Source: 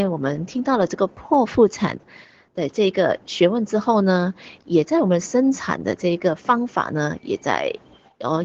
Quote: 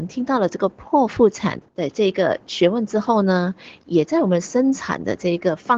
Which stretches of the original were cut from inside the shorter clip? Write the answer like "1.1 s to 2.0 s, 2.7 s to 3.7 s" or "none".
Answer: 2.1 s to 2.5 s